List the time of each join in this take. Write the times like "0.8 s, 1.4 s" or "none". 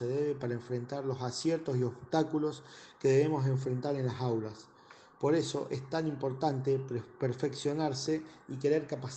none